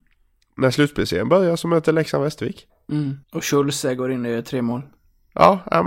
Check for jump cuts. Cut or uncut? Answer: cut